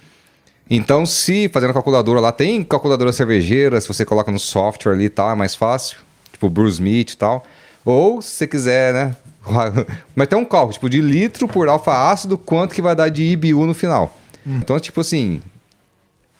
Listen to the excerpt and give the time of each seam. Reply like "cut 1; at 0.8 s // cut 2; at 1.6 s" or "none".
cut 1; at 10.1 s // cut 2; at 14.6 s